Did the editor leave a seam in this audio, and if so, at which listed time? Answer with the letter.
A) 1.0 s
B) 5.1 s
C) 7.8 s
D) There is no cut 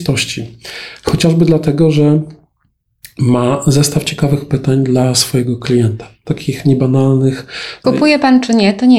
C